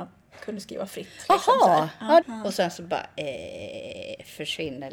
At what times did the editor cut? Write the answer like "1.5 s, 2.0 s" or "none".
2.2 s